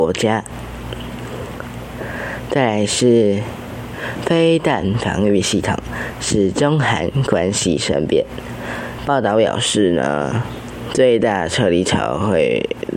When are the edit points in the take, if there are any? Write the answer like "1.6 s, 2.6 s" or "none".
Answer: 9.0 s